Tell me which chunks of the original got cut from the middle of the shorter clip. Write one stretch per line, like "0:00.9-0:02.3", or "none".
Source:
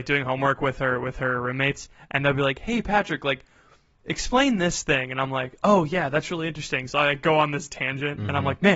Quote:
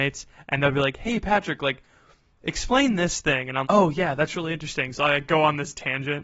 0:05.3-0:05.6

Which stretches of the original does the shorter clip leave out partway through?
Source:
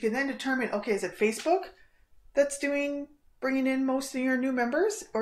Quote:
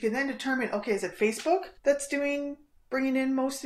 0:01.8-0:02.3

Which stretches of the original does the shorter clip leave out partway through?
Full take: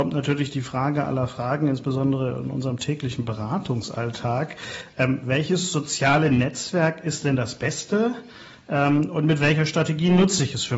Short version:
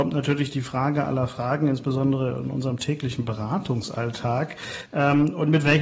0:04.9-0:08.6

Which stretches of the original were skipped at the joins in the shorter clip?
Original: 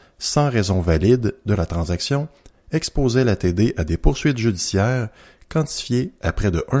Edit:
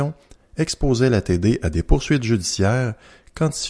none

